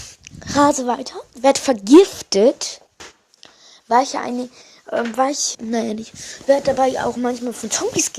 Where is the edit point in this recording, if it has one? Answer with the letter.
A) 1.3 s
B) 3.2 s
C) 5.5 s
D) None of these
C